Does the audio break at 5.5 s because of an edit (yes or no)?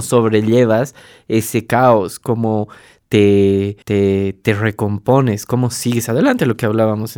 no